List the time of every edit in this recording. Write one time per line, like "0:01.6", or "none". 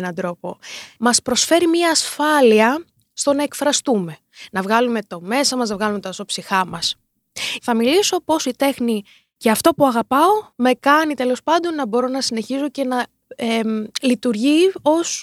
0:01.0
0:07.6
0:10.5